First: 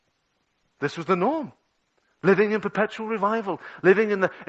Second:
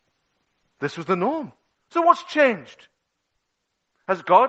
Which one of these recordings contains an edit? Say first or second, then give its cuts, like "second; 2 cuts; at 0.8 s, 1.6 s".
second; 1 cut; at 1.7 s